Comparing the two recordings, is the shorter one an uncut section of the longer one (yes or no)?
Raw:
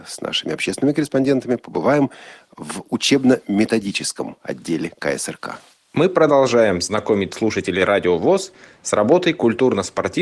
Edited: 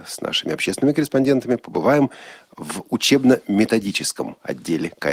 yes